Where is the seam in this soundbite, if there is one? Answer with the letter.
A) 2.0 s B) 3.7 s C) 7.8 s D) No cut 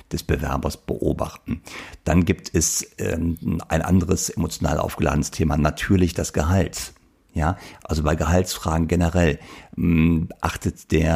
D